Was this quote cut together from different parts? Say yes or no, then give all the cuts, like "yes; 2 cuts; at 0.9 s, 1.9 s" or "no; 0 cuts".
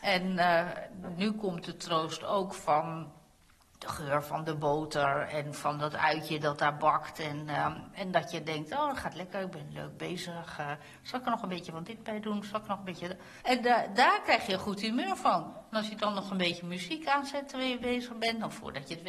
yes; 1 cut; at 13.4 s